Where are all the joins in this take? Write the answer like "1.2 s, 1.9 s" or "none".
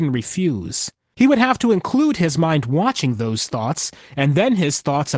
1.1 s